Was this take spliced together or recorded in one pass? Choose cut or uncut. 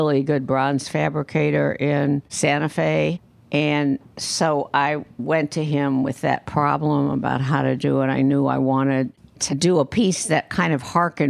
uncut